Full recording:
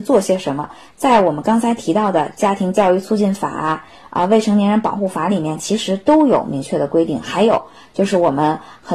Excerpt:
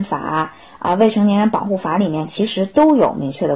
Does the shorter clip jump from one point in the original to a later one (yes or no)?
no